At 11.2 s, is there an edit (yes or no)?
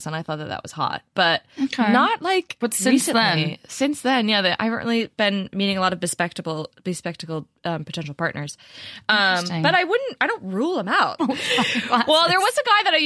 yes